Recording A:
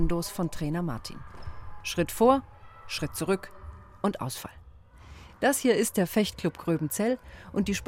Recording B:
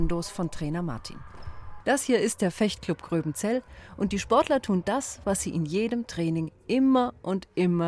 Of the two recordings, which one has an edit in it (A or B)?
B